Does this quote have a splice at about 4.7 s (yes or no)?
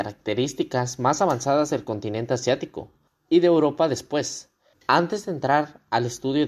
yes